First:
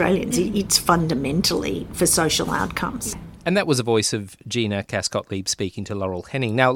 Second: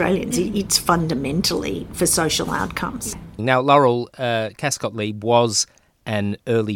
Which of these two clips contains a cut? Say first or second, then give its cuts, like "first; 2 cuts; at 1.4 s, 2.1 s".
second; 1 cut; at 3.4 s